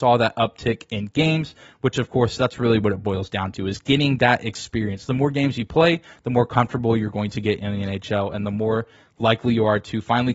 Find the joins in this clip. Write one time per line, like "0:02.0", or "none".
none